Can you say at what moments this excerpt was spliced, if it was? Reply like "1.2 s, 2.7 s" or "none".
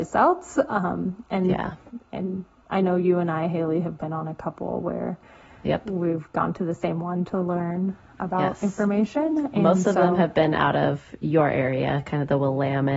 none